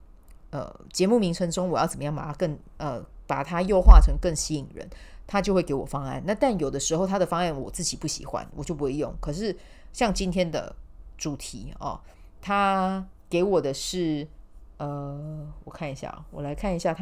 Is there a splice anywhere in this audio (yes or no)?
no